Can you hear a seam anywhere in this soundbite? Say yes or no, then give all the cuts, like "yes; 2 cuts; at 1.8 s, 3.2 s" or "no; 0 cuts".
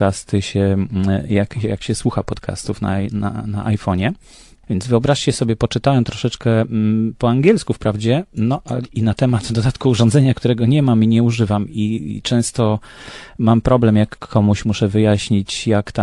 yes; 1 cut; at 4.6 s